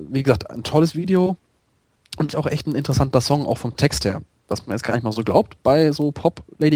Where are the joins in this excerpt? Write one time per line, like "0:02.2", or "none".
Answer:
0:02.3